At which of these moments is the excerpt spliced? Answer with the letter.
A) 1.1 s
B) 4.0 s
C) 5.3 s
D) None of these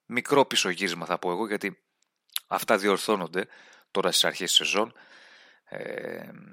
D